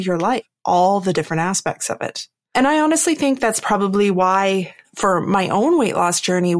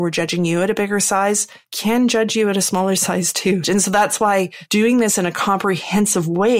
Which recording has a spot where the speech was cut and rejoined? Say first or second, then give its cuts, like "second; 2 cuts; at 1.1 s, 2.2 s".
second; 1 cut; at 3.6 s